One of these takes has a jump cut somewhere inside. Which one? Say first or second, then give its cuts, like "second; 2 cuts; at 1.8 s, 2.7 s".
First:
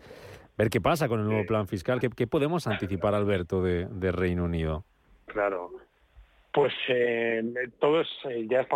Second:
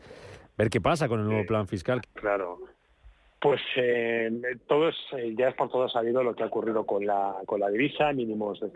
second; 1 cut; at 2.0 s